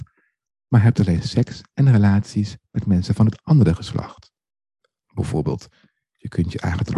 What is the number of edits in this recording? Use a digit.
1